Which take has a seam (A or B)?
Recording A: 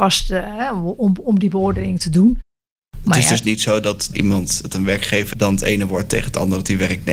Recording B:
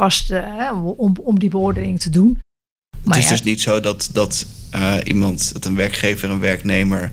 A